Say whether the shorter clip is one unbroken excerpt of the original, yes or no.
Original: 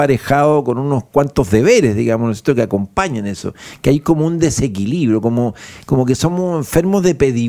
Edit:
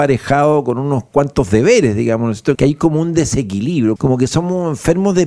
no